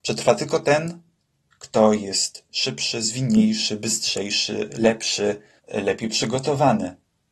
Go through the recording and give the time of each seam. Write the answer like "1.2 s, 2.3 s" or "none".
5.6 s